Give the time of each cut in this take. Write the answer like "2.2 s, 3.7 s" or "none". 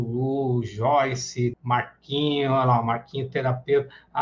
1.5 s